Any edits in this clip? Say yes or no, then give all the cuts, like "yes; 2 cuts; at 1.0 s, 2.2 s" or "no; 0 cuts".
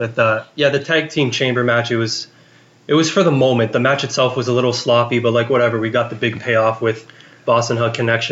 no; 0 cuts